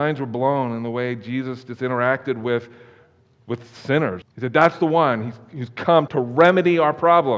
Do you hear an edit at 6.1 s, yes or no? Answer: yes